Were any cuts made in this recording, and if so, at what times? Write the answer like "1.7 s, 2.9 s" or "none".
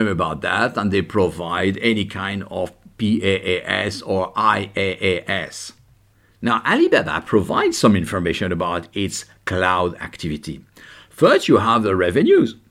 none